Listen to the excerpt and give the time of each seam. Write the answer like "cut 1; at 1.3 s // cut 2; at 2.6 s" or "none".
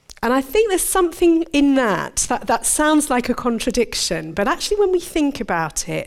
none

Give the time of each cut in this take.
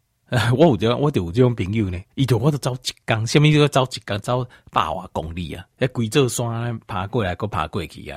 cut 1; at 2.1 s // cut 2; at 4.2 s // cut 3; at 5.7 s

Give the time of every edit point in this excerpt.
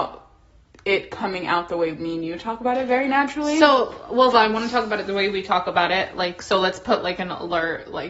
cut 1; at 4.3 s

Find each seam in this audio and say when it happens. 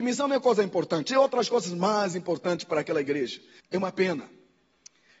cut 1; at 3.6 s

